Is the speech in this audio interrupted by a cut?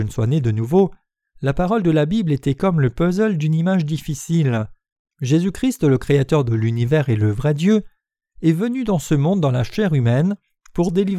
yes; 1 cut; at 5.1 s

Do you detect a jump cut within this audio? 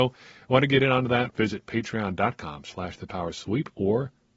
yes; 1 cut; at 1.3 s

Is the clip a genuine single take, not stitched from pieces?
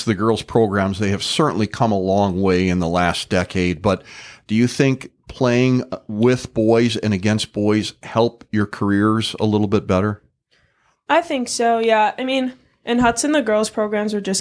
yes; 0 cuts

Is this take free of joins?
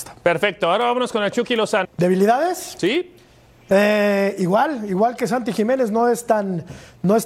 no; 1 cut; at 1.8 s

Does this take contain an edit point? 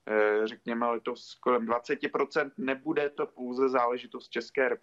no; 0 cuts

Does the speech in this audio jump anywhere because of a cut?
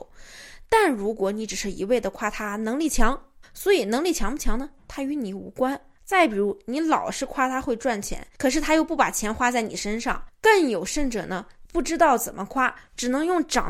yes; 1 cut; at 3.4 s

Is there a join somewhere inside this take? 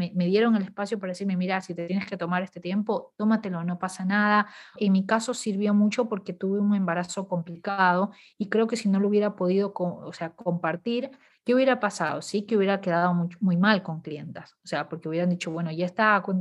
yes; 1 cut; at 4.8 s

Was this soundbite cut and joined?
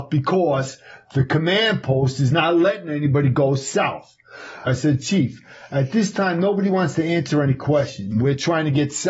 yes; 2 cuts; at 4.7 s, 8.1 s

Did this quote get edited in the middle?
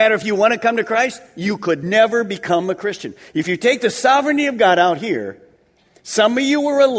no; 0 cuts

